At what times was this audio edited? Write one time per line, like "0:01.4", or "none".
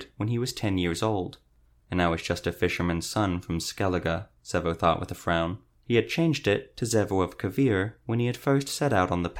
0:01.8
0:05.8